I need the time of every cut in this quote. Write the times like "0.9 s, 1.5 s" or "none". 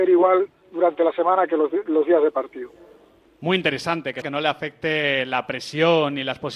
4.2 s